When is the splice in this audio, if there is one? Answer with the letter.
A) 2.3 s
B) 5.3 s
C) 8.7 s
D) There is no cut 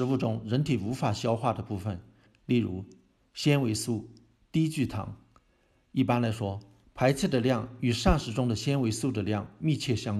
A